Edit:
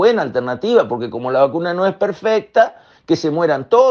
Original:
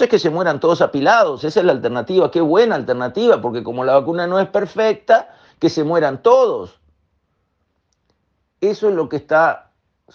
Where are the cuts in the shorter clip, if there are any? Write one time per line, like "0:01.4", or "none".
none